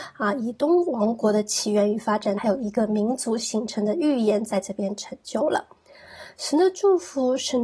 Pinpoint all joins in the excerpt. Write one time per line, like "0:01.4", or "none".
0:02.4